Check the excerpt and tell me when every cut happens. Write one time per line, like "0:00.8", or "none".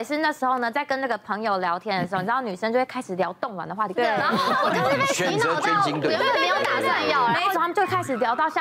0:04.0
0:07.5